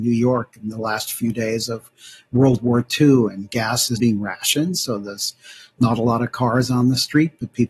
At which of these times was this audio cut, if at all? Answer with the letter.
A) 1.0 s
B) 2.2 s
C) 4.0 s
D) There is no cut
C